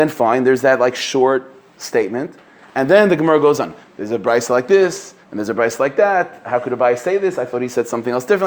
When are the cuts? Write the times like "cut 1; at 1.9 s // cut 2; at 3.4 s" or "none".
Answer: cut 1; at 3.9 s